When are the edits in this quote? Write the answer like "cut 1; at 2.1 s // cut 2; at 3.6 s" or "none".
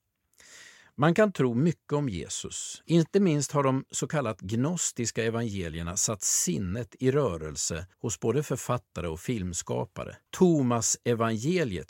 cut 1; at 2.8 s // cut 2; at 7.9 s // cut 3; at 10.3 s